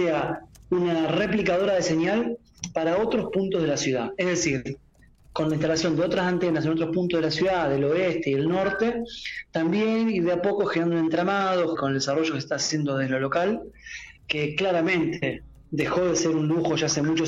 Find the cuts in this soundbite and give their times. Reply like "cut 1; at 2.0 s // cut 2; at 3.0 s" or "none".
cut 1; at 11.8 s // cut 2; at 14.2 s